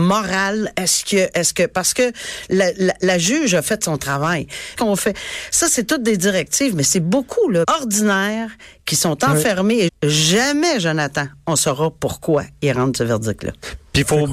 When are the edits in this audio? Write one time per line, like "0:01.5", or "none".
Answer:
0:04.8
0:07.6
0:09.9